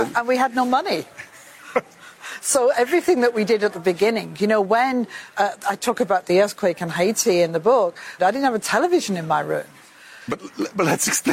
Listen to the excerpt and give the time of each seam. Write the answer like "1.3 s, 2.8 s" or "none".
8.2 s, 10.2 s